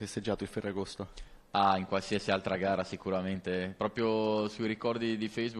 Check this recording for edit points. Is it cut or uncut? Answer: uncut